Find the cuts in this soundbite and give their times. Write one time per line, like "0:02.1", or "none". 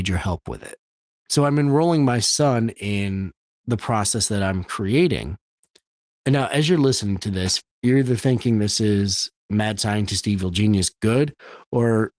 0:07.6
0:09.4